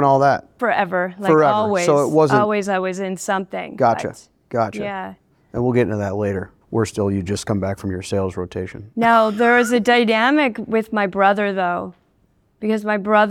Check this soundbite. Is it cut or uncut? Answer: uncut